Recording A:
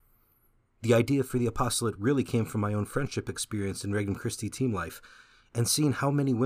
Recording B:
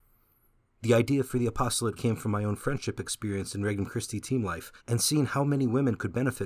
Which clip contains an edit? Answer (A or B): B